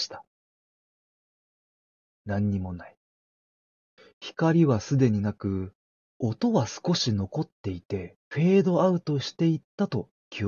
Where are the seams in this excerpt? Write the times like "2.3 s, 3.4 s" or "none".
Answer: 6.1 s, 8.2 s